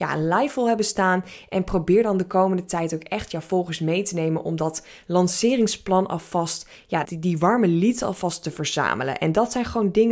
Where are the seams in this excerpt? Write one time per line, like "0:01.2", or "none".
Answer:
0:07.0